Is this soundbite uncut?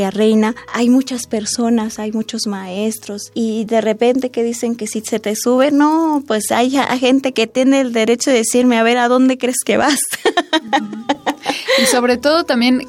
yes; 0 cuts

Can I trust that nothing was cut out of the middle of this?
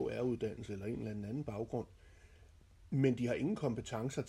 yes; 0 cuts

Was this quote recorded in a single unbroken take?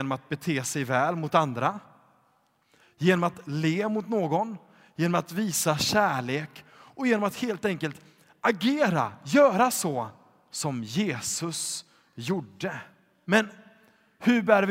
no; 1 cut; at 13.2 s

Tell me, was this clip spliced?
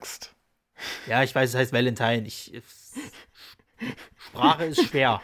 no; 0 cuts

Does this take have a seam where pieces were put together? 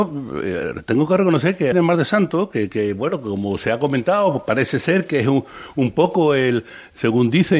yes; 1 cut; at 1.7 s

